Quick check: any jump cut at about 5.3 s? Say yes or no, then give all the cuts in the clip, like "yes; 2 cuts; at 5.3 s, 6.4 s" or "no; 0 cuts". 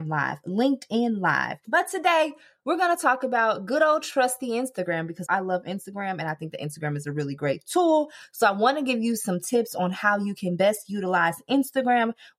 yes; 2 cuts; at 1.6 s, 5.3 s